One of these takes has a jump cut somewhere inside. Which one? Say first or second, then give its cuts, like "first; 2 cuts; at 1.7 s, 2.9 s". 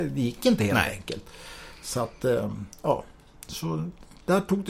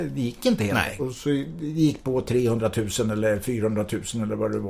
second; 1 cut; at 1.0 s